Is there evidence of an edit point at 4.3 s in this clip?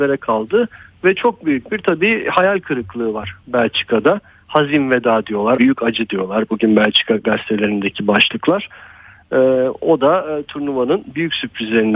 no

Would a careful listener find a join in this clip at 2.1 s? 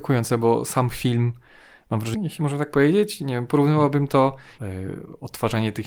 yes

